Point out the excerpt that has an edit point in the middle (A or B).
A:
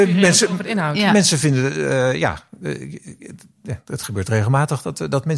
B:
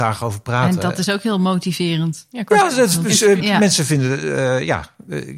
B